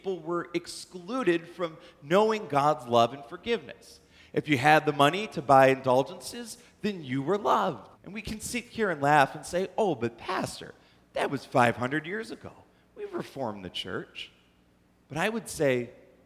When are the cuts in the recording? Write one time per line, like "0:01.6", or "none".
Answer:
0:07.9